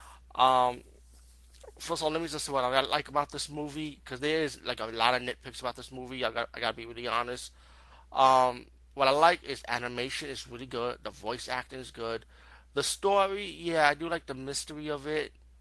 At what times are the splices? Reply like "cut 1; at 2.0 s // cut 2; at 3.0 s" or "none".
none